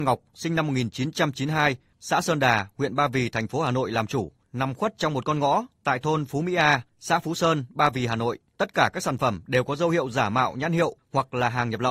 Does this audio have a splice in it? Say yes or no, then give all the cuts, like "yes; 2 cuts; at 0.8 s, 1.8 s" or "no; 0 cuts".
yes; 2 cuts; at 1.9 s, 8.5 s